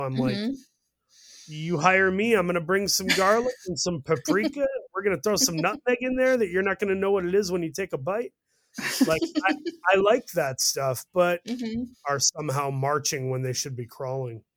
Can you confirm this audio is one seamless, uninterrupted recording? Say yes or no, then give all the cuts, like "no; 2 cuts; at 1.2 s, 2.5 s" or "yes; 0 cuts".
no; 1 cut; at 11.9 s